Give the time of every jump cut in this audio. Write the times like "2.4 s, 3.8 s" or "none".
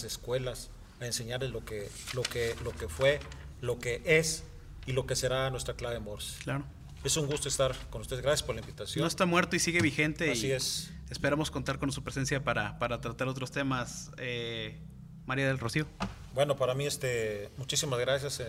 16.3 s